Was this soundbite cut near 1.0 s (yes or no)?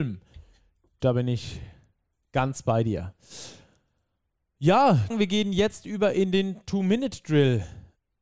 yes